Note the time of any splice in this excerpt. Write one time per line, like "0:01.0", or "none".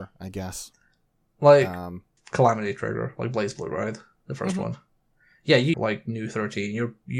0:02.2
0:05.7